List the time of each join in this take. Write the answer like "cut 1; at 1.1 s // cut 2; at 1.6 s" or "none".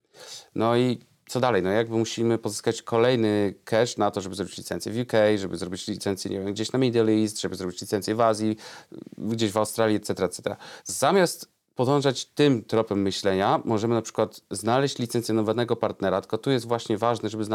cut 1; at 10.8 s